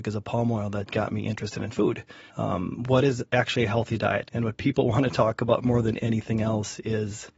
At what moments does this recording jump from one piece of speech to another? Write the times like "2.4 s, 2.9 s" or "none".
2.3 s, 4.3 s